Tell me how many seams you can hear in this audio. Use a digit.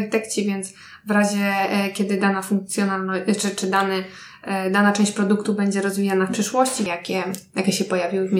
1